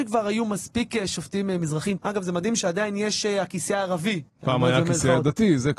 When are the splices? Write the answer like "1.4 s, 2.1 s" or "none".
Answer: 2.0 s